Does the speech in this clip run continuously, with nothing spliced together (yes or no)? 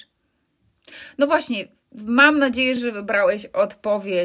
yes